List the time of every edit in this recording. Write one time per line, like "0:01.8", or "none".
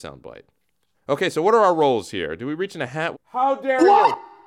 0:00.9
0:03.1